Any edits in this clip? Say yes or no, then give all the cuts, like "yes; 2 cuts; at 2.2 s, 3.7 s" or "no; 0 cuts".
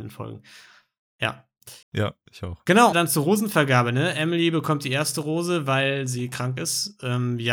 yes; 2 cuts; at 1.8 s, 2.9 s